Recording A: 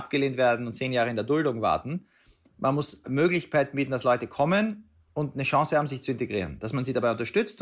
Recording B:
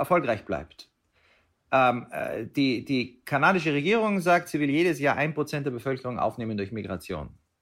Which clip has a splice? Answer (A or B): A